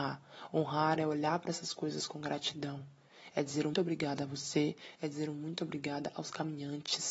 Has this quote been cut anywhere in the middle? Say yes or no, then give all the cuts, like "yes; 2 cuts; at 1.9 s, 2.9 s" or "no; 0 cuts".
yes; 2 cuts; at 3.7 s, 4.9 s